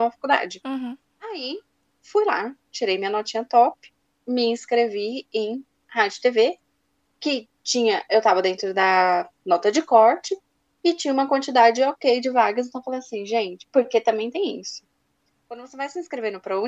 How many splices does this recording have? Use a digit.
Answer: 0